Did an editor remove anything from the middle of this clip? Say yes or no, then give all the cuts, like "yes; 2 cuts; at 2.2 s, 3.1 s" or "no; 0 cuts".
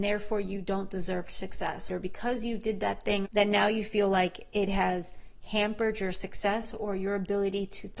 yes; 2 cuts; at 1.9 s, 3.2 s